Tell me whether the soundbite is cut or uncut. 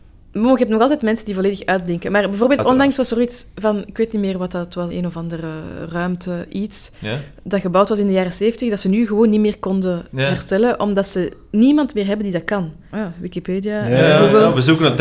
cut